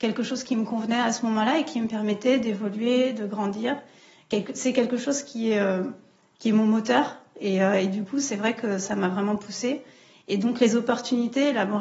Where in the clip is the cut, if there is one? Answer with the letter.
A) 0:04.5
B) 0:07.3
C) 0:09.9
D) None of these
D